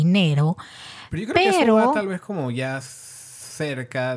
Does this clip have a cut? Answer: no; 0 cuts

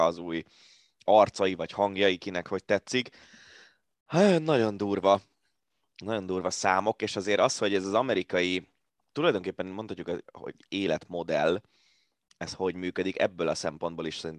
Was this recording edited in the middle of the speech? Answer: yes; 1 cut; at 9.1 s

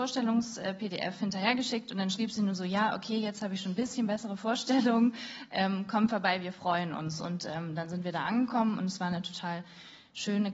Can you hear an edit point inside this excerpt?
no; 0 cuts

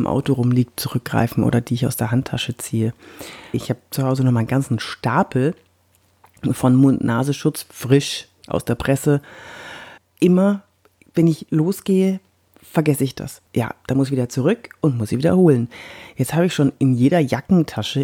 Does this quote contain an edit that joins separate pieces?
yes; 3 cuts; at 3.5 s, 10.0 s, 13.5 s

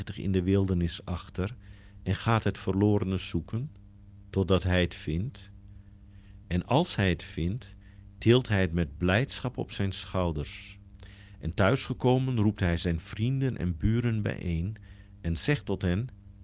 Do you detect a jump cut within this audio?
no; 0 cuts

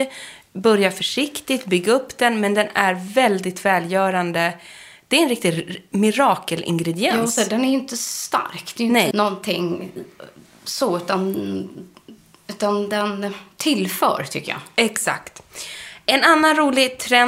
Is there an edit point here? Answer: yes; 1 cut; at 9.1 s

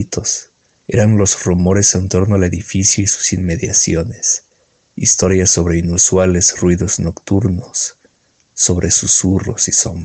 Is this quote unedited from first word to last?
no; 1 cut; at 4.9 s

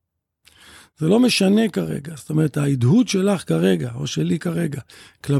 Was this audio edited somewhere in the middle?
no; 0 cuts

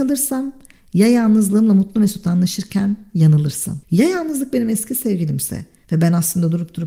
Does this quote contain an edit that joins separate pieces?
yes; 1 cut; at 3.8 s

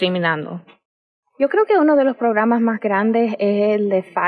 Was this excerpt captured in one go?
no; 1 cut; at 1.2 s

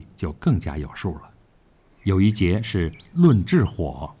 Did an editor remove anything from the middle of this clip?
yes; 1 cut; at 2.0 s

